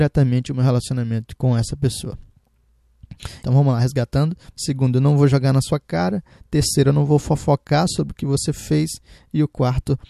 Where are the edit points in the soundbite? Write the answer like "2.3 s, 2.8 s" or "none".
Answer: 3.4 s, 4.5 s